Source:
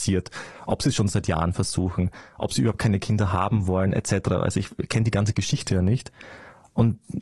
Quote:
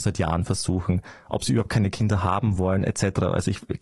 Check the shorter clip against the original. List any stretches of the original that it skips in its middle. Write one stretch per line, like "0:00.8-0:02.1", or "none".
none